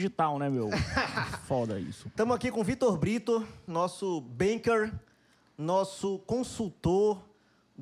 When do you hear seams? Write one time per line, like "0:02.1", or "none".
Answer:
0:03.7